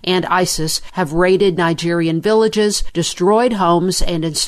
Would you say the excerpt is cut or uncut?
uncut